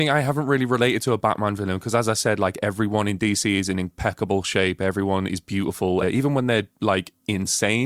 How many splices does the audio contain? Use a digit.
1